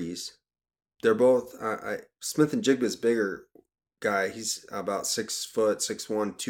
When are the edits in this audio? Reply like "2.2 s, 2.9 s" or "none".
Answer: none